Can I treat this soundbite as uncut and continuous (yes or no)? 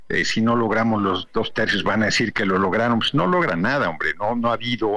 yes